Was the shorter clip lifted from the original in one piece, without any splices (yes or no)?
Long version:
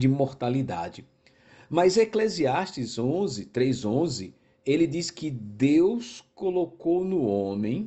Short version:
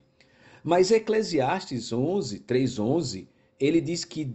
yes